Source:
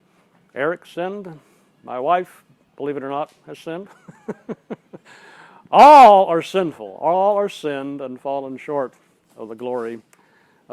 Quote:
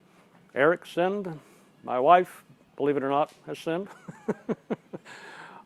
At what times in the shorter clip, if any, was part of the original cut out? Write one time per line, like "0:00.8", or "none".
none